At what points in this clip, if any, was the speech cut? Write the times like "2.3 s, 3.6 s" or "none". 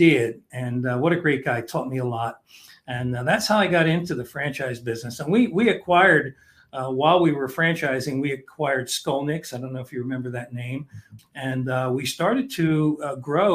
11.2 s

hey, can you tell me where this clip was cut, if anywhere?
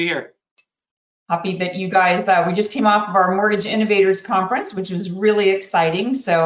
none

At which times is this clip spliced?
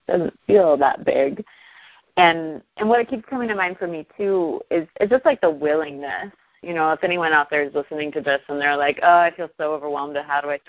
4.9 s

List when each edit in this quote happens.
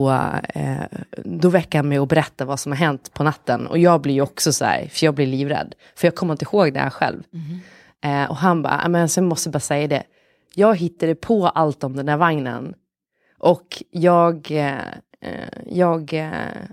none

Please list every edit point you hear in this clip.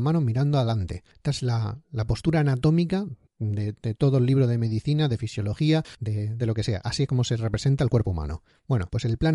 6.4 s

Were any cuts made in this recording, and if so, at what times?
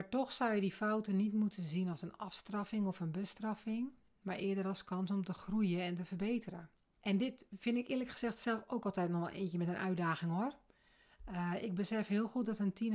6.9 s

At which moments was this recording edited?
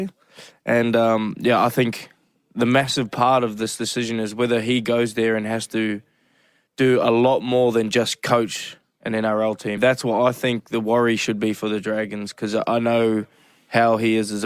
9.8 s

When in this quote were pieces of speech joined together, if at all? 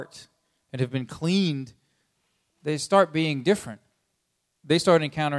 none

